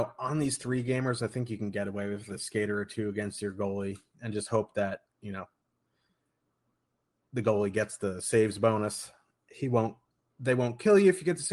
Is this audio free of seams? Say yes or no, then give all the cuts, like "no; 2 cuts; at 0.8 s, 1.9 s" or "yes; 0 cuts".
no; 1 cut; at 4.1 s